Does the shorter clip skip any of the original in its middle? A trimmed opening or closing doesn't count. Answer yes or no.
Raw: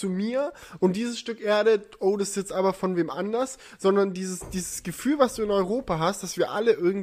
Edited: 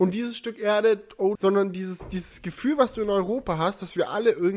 yes